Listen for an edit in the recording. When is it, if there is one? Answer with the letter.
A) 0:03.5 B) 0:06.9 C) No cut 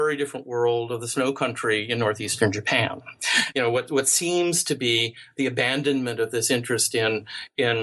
A